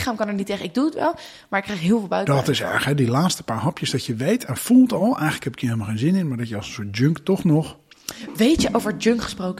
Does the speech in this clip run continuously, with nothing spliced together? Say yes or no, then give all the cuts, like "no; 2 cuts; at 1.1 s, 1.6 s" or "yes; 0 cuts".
yes; 0 cuts